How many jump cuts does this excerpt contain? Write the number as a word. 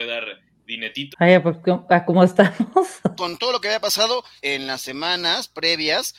three